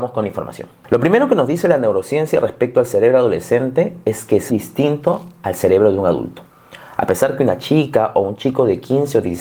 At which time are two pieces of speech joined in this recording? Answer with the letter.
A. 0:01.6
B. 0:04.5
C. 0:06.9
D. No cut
B